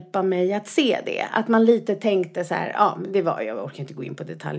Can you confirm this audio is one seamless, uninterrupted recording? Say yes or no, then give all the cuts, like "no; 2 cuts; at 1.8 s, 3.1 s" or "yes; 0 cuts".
yes; 0 cuts